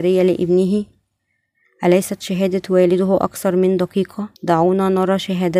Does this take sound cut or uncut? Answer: cut